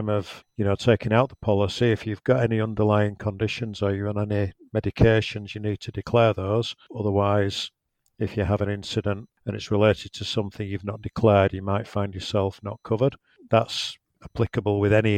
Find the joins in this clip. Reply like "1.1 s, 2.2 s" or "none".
none